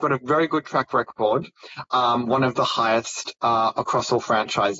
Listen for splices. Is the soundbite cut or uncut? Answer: uncut